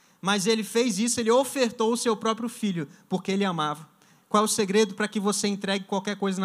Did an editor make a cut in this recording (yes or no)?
no